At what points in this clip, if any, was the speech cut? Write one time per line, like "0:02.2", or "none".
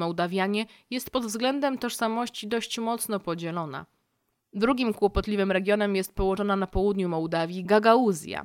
0:04.4